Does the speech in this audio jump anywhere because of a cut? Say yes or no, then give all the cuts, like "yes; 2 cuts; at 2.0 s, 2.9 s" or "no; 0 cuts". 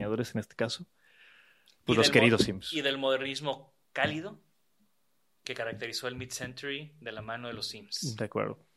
no; 0 cuts